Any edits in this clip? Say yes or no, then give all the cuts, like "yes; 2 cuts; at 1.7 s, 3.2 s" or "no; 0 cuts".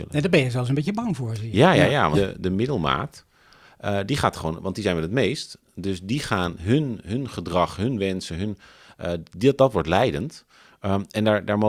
yes; 1 cut; at 2.1 s